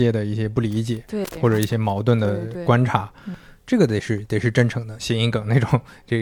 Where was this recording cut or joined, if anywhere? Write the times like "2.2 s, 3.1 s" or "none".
5.0 s

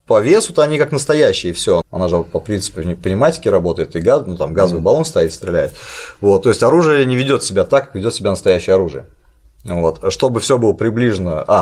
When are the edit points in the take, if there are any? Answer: 1.8 s

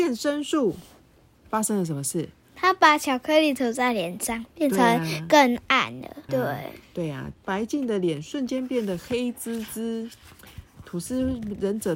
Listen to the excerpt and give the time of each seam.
6.3 s, 7.3 s

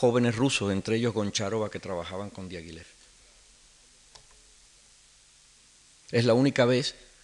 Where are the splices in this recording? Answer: 6.0 s

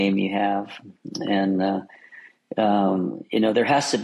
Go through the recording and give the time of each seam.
none

